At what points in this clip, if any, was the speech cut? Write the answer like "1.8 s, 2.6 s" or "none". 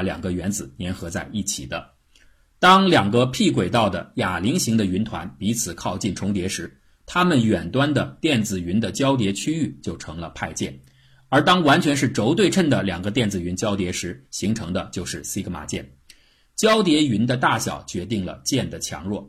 none